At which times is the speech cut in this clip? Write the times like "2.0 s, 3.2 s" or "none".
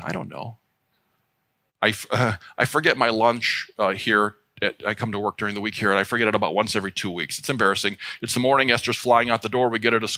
none